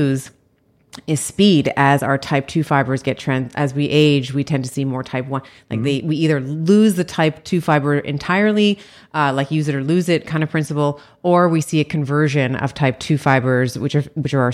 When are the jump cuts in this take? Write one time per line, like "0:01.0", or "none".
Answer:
none